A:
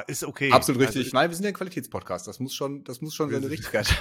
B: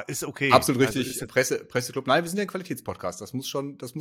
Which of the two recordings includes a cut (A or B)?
A